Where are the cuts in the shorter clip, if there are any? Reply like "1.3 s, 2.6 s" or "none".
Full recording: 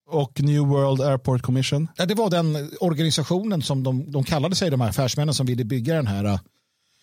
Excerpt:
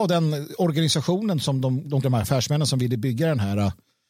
2.0 s